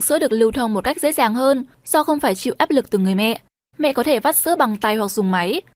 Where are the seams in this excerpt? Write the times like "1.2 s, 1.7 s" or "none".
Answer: 3.7 s